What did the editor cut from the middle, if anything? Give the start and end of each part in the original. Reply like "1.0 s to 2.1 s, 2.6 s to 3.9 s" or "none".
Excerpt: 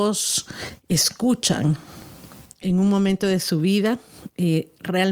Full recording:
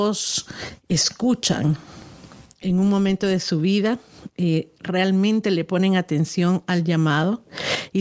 none

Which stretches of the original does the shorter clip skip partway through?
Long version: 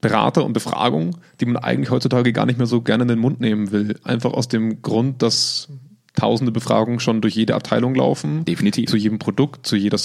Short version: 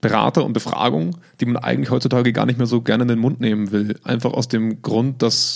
none

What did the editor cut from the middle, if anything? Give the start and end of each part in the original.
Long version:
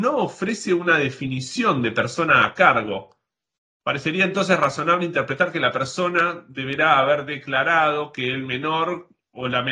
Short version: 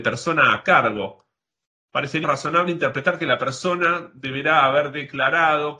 4.2 s to 4.6 s

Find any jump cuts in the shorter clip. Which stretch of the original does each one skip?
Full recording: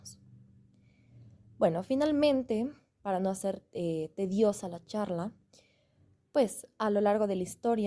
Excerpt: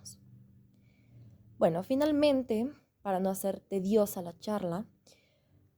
3.7 s to 4.1 s

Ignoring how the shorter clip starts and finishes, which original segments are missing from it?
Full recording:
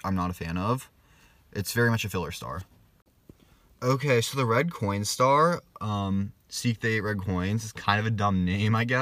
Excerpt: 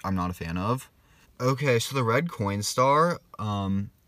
1.2 s to 3.7 s

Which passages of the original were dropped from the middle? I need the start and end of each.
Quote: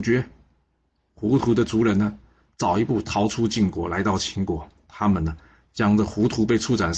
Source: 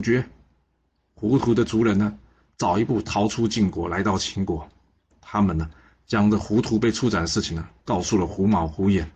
4.8 s to 5.1 s

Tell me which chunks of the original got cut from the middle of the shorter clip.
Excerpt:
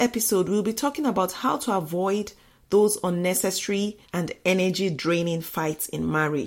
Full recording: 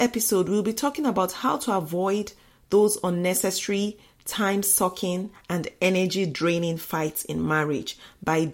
4.0 s to 5.4 s

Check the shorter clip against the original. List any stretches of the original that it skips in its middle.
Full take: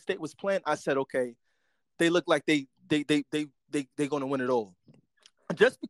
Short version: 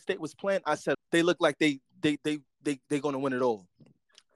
0.9 s to 1.8 s, 3.0 s to 3.3 s

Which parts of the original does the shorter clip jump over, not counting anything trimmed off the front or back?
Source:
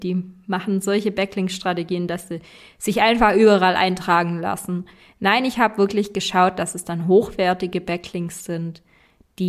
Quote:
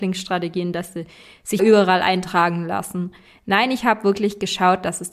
2.9 s to 3.3 s

